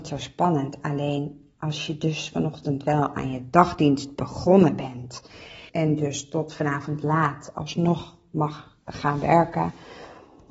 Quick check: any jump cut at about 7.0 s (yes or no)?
no